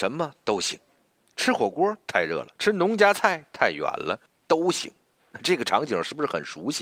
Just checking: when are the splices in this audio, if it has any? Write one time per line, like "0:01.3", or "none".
0:02.5
0:04.3

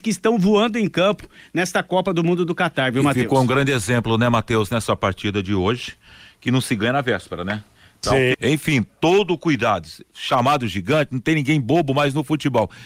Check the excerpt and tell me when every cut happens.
0:08.3

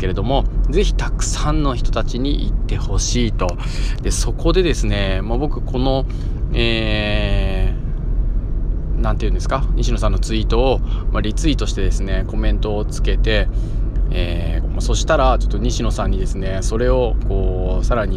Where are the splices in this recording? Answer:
0:14.6

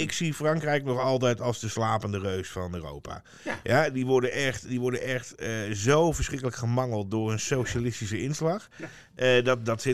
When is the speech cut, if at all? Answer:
none

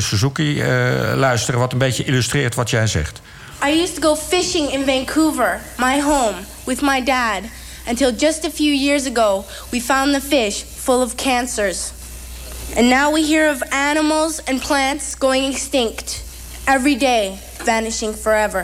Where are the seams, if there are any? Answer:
none

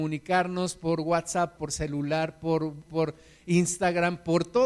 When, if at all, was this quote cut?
0:01.6
0:02.9

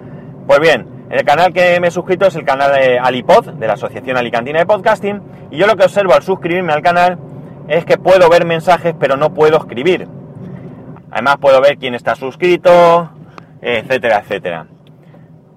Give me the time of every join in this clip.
0:10.9

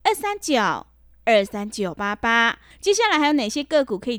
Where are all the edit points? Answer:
0:02.7

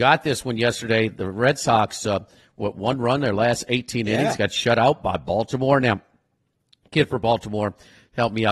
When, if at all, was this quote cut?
none

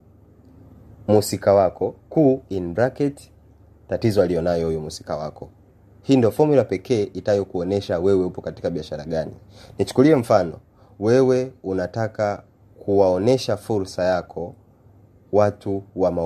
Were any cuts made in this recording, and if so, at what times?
0:02.0

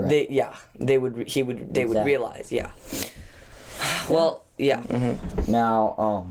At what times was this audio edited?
0:04.8

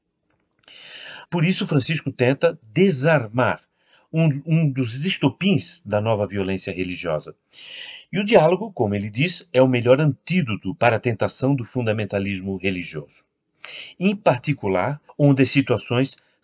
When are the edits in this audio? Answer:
0:01.3
0:15.1

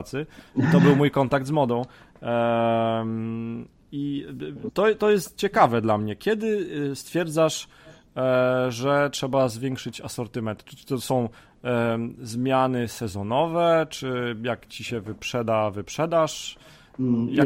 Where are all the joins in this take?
none

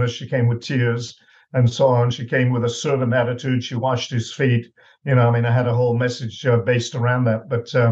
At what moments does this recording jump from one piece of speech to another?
none

